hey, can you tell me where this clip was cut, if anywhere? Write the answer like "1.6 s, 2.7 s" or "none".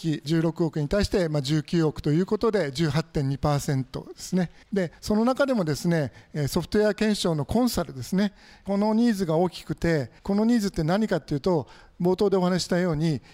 4.6 s, 10.2 s